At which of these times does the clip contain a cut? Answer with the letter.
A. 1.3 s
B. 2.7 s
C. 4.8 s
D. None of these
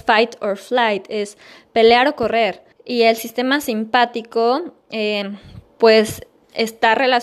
B